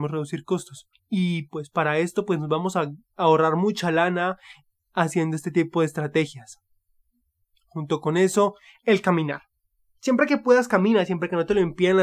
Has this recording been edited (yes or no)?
yes